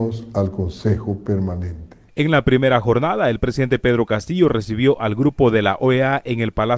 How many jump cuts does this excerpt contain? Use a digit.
0